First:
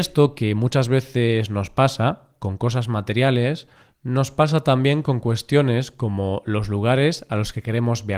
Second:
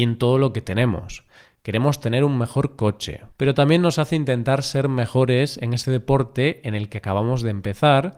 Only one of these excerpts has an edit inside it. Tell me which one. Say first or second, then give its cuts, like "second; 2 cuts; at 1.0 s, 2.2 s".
second; 1 cut; at 3.3 s